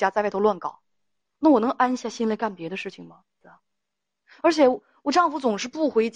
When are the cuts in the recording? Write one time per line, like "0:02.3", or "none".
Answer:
0:03.4

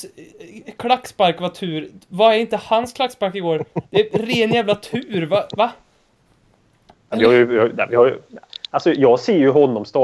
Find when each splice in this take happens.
none

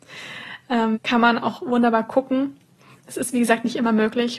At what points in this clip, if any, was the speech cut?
0:00.9

